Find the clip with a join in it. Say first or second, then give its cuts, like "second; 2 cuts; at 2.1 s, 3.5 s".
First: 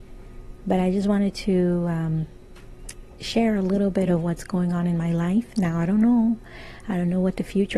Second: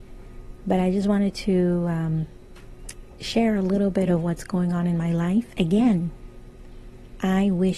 second; 1 cut; at 5.5 s